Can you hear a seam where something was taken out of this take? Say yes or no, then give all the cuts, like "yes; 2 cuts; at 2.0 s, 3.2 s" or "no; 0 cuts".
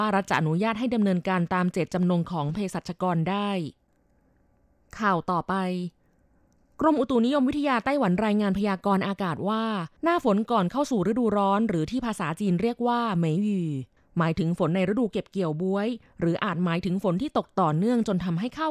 yes; 1 cut; at 10.0 s